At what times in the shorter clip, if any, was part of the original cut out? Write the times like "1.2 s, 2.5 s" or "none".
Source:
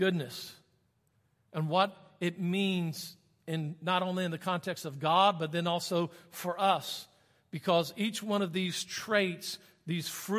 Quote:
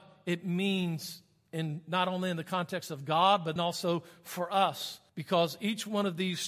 3.6 s, 5.1 s